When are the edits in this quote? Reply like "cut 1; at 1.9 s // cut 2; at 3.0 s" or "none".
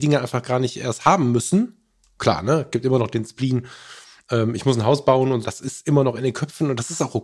cut 1; at 5.4 s